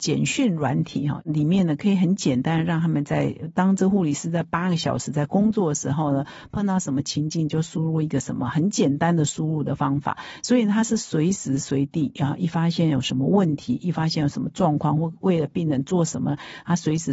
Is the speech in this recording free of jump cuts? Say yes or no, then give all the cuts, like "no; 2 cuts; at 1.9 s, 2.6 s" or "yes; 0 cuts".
yes; 0 cuts